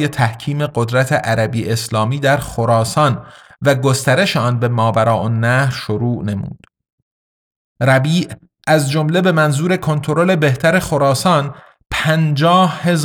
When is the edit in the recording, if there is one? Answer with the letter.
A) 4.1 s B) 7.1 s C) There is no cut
C